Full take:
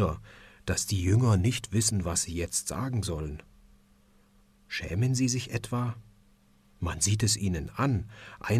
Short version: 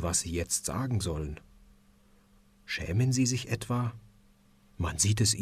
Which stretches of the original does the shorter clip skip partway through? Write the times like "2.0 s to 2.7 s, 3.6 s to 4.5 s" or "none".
none